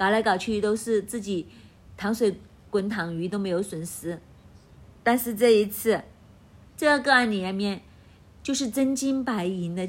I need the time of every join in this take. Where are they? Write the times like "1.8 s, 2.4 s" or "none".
8.2 s